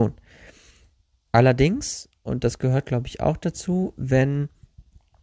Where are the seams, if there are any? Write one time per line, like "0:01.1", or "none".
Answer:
none